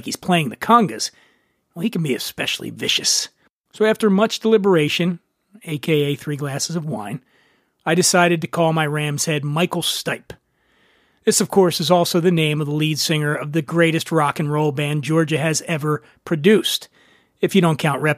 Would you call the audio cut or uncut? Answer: uncut